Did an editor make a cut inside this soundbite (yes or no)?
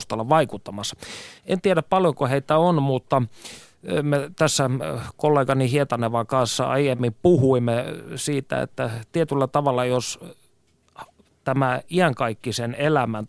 yes